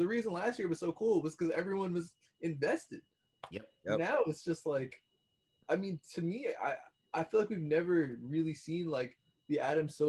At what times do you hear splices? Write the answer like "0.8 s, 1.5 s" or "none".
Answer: none